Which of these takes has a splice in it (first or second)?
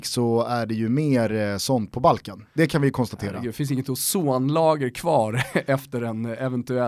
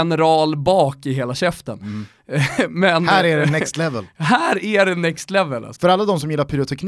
second